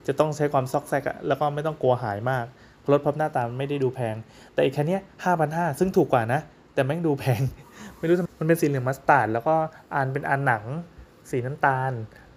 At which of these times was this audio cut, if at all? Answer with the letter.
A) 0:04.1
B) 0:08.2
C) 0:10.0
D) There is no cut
B